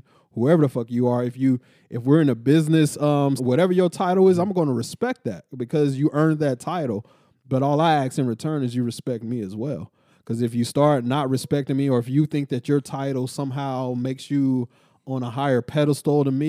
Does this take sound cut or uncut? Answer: cut